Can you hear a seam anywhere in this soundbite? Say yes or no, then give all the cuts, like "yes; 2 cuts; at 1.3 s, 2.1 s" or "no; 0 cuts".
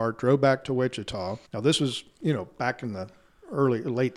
yes; 1 cut; at 1.5 s